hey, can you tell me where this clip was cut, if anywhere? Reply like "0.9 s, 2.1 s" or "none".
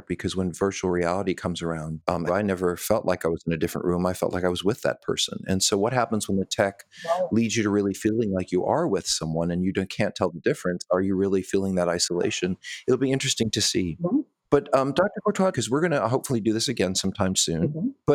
2.3 s, 15.5 s